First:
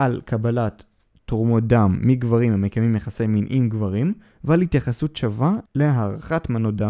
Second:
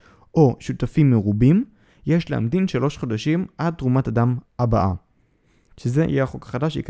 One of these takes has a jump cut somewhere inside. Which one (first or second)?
second